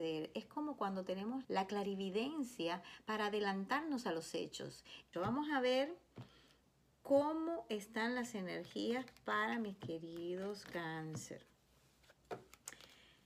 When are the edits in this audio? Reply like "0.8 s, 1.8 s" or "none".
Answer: 1.4 s, 5.1 s